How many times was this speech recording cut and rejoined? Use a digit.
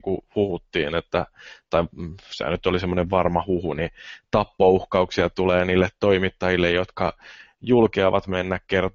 0